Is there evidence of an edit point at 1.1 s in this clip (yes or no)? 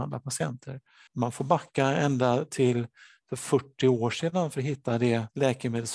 yes